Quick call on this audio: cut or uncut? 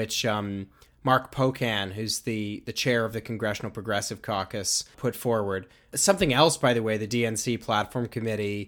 uncut